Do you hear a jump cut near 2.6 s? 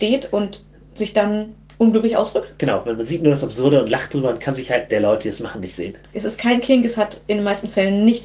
no; 2 cuts; at 4.9 s, 6.1 s

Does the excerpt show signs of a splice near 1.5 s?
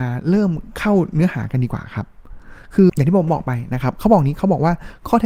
no; 1 cut; at 2.9 s

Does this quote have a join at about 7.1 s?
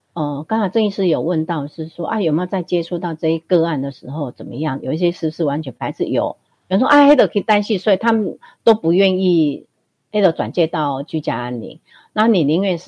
no; 0 cuts

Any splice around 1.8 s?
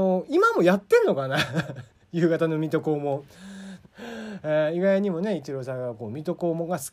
no; 1 cut; at 3.8 s

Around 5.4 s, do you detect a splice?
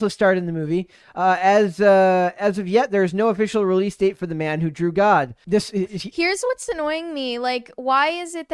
yes; 1 cut; at 5.4 s

